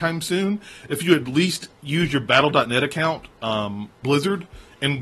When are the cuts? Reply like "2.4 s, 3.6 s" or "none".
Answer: 4.0 s